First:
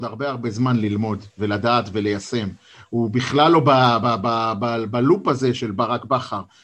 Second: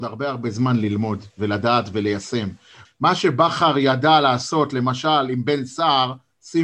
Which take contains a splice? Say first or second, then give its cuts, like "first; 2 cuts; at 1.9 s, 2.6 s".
second; 1 cut; at 2.9 s